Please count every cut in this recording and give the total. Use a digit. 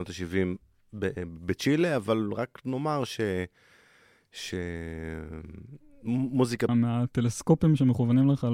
1